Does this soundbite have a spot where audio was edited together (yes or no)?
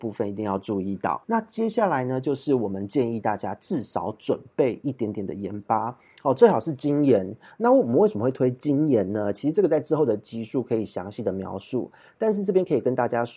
yes